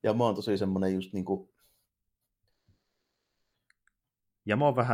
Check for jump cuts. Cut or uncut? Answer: uncut